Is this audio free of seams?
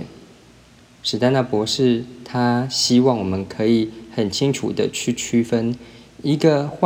yes; 0 cuts

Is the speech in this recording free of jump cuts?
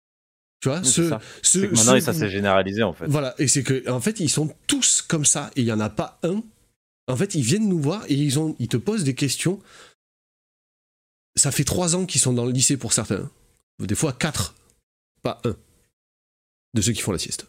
no; 1 cut; at 15.1 s

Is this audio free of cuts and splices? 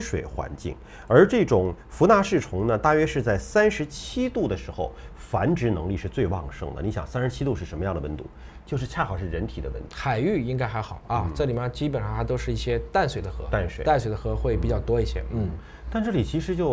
no; 1 cut; at 9.9 s

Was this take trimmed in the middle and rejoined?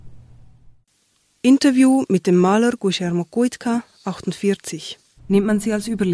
yes; 1 cut; at 5.2 s

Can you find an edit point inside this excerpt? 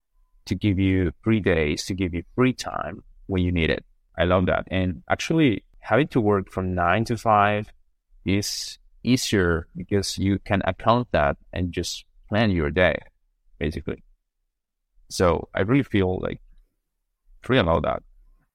yes; 1 cut; at 4.1 s

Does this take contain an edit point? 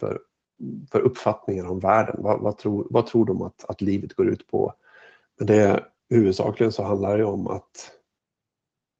yes; 1 cut; at 5.2 s

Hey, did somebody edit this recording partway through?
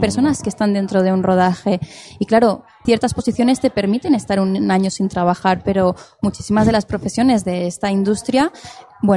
yes; 1 cut; at 2.8 s

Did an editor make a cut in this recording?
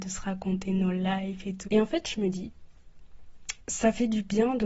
yes; 2 cuts; at 1.6 s, 3.6 s

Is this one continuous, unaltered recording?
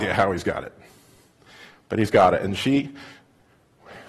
yes; 0 cuts

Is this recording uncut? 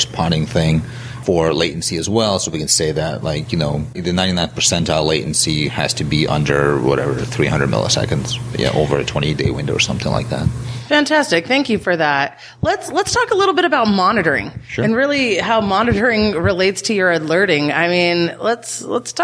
no; 1 cut; at 3.9 s

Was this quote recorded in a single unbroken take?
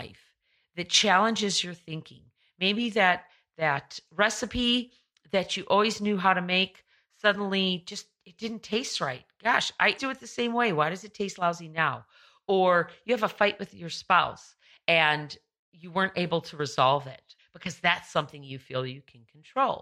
no; 2 cuts; at 10.0 s, 17.4 s

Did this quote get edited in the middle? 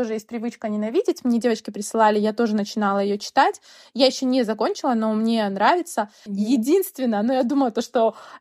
yes; 1 cut; at 6.3 s

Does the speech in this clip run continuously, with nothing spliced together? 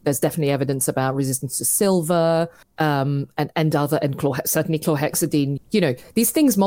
no; 1 cut; at 5.6 s

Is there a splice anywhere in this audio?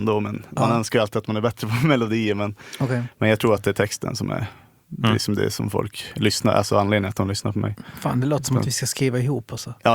no; 0 cuts

